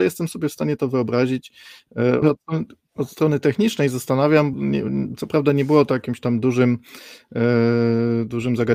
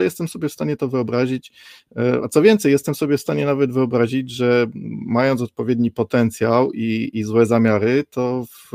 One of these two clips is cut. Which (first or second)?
first